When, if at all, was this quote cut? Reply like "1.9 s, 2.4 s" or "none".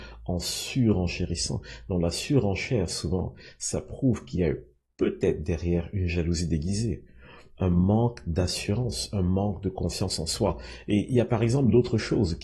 10.8 s